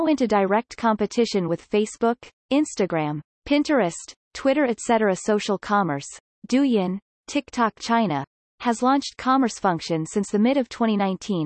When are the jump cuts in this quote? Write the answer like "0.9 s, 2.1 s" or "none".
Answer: 3.2 s